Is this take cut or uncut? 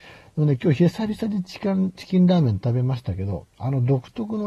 uncut